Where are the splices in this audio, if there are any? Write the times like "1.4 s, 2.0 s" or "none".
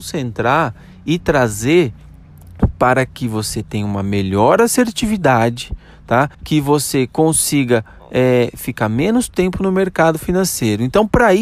6.3 s

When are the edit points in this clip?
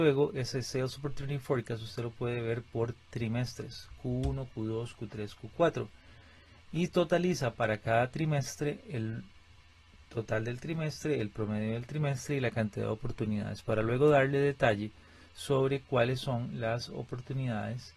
none

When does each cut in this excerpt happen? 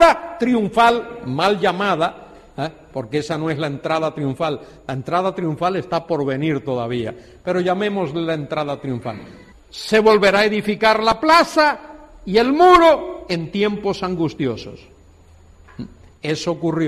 9.5 s

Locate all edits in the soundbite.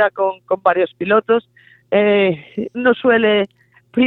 2.7 s

